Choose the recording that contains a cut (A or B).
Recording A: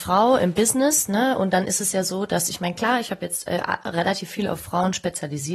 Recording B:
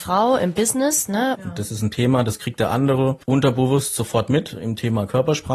B